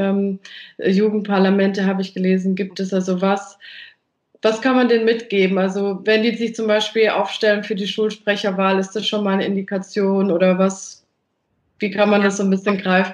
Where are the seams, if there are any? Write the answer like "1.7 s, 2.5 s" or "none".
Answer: none